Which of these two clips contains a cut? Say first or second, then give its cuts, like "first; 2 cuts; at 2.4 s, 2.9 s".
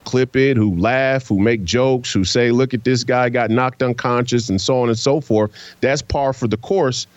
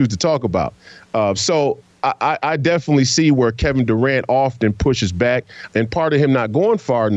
second; 1 cut; at 5.7 s